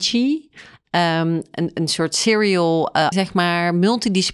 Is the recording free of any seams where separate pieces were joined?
no; 1 cut; at 3.1 s

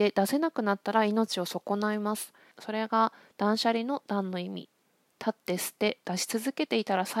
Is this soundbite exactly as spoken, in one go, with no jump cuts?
no; 1 cut; at 2.5 s

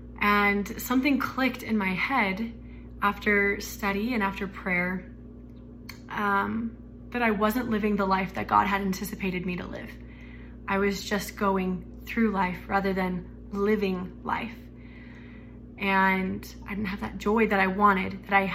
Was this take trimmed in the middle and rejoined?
no; 0 cuts

